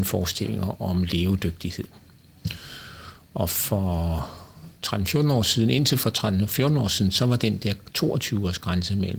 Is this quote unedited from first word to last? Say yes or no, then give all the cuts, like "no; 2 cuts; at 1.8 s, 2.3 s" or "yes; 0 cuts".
yes; 0 cuts